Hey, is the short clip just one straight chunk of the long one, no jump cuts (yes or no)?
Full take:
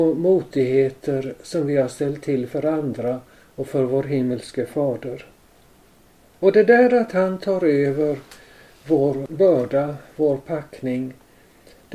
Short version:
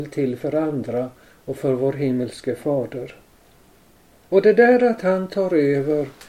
yes